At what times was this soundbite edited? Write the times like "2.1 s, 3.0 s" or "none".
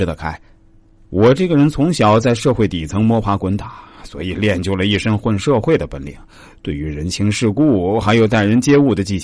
1.0 s